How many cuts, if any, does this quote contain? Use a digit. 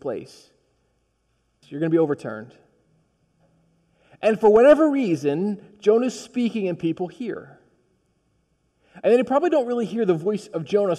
1